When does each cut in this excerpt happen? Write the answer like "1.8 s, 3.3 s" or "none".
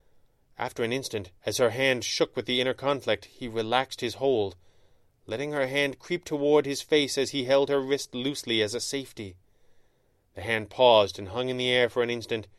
1.4 s